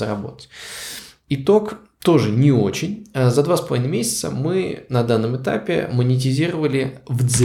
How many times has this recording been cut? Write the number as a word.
zero